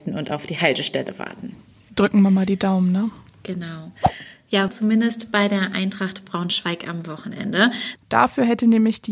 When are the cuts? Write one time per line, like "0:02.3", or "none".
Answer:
0:04.7
0:08.0